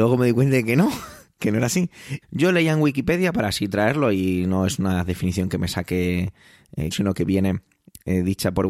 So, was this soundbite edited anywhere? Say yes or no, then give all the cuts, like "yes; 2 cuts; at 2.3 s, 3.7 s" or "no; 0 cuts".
yes; 2 cuts; at 2.2 s, 6.9 s